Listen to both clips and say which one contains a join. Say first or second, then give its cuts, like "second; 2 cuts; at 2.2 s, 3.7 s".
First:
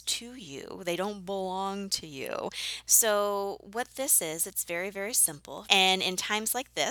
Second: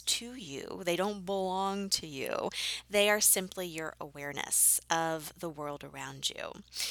first; 2 cuts; at 2.8 s, 5.6 s